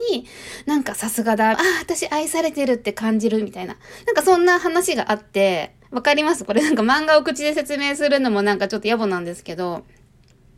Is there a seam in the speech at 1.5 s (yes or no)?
yes